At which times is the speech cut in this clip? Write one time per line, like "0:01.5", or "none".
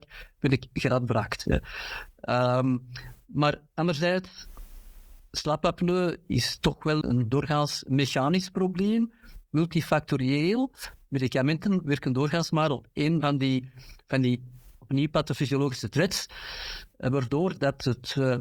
0:07.0